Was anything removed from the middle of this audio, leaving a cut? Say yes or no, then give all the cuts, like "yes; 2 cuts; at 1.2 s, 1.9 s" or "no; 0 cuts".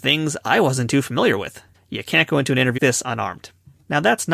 yes; 2 cuts; at 1.7 s, 2.8 s